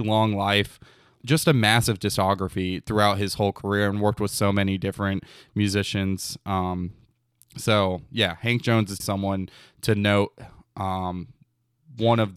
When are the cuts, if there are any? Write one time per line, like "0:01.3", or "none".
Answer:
0:01.2
0:09.0

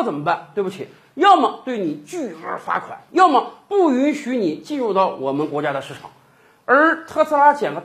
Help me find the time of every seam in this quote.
none

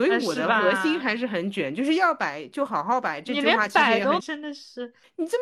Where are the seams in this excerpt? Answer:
0:04.2

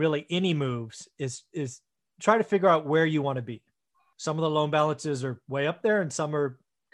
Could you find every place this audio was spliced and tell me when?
0:04.1

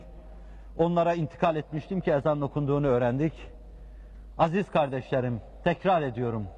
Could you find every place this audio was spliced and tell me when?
none

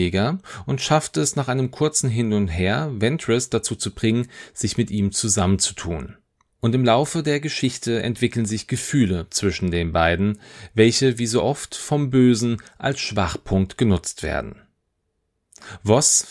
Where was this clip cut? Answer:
none

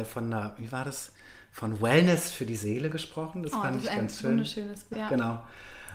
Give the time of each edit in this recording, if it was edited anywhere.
0:04.9

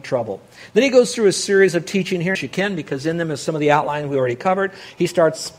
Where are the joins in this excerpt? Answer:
0:02.3

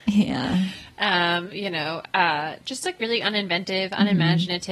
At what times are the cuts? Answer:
none

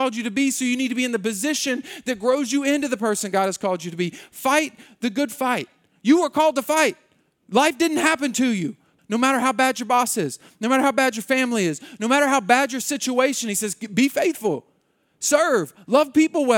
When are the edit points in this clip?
0:09.0

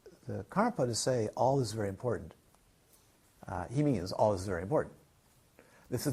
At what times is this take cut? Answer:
none

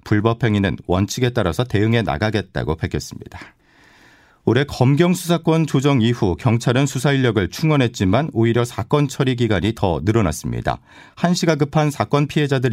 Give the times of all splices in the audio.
none

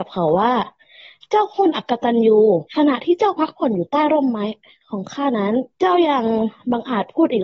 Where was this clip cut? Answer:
0:02.7
0:05.7

